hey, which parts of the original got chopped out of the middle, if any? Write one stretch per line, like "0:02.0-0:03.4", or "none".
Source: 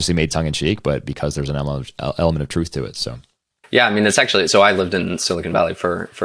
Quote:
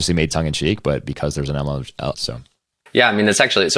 0:02.1-0:02.9